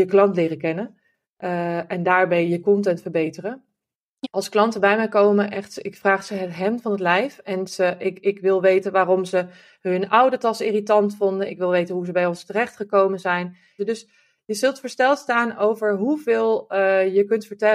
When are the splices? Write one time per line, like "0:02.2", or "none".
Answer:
0:04.2
0:13.8